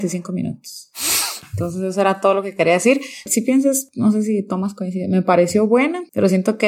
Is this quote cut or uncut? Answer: uncut